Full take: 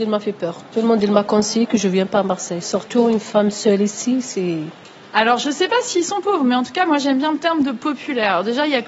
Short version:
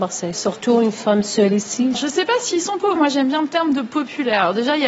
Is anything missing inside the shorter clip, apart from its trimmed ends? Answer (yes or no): yes